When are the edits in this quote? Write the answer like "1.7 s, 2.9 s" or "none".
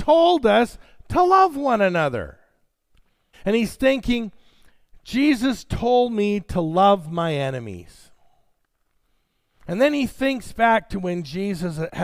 3.3 s